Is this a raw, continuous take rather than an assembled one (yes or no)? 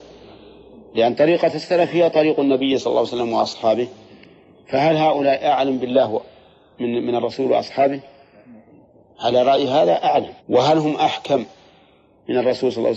no